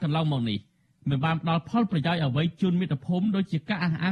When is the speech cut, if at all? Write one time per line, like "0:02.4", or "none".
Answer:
none